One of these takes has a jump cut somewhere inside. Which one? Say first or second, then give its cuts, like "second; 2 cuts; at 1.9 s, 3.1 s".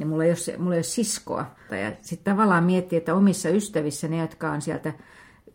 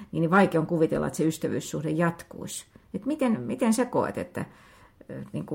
first; 1 cut; at 1.7 s